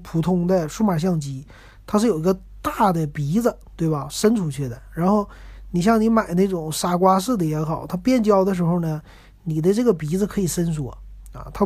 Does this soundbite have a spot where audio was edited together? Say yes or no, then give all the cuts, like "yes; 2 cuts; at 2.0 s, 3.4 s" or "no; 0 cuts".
no; 0 cuts